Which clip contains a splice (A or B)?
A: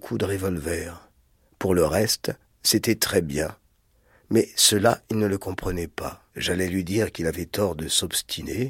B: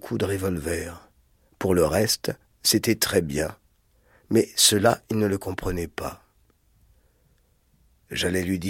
A